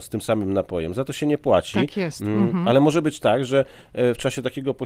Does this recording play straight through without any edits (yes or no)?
yes